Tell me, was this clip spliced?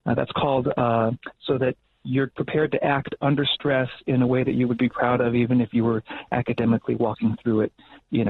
yes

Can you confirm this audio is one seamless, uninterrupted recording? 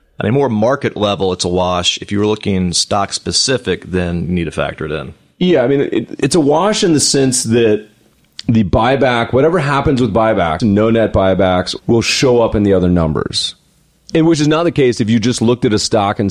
no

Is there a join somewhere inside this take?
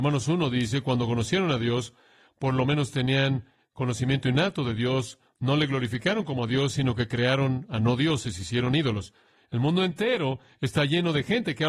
no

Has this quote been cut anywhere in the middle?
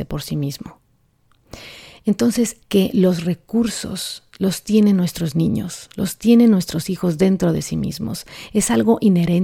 yes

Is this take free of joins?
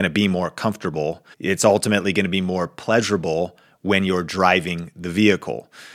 no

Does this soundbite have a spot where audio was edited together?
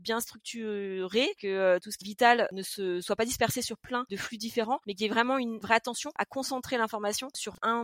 yes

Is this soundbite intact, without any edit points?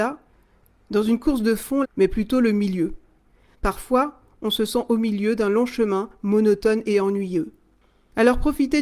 no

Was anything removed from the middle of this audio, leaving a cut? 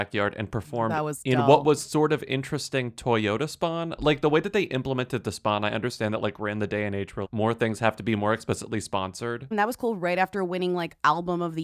yes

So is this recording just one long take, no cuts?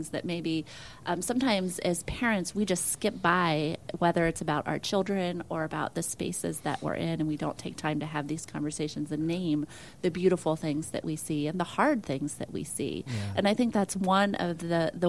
yes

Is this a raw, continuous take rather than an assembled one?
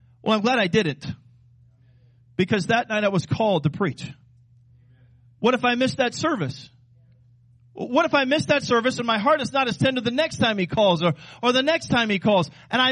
yes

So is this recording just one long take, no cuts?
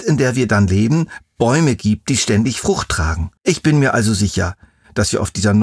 no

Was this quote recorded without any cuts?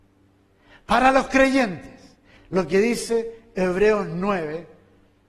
no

